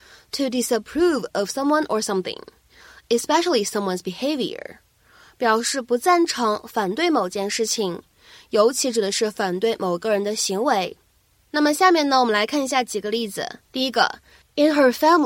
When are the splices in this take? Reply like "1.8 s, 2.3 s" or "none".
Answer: 13.7 s